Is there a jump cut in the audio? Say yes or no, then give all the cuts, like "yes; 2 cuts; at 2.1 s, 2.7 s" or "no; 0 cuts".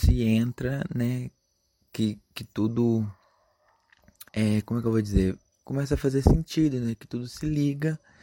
yes; 1 cut; at 4.3 s